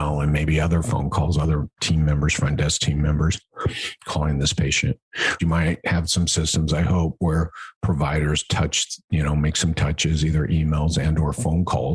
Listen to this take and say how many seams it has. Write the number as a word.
one